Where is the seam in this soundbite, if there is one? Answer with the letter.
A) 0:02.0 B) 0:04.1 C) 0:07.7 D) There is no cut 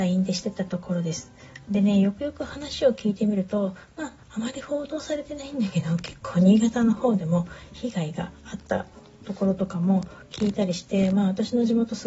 D